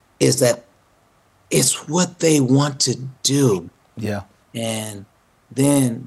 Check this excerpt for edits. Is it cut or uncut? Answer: cut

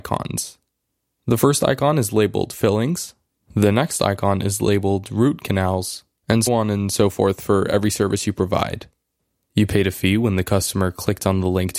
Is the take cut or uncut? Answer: cut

